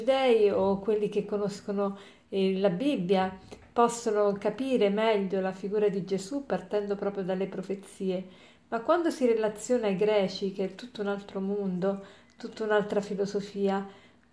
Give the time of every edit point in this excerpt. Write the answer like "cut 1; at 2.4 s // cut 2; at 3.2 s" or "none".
none